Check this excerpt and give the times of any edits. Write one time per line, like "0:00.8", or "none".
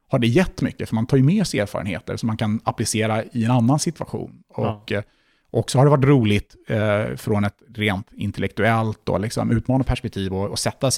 none